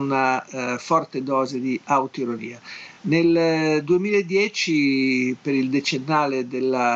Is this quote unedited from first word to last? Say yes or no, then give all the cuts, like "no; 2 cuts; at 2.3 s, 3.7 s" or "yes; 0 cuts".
yes; 0 cuts